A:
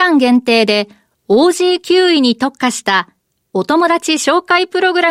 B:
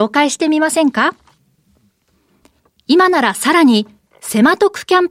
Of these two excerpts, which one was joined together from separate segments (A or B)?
B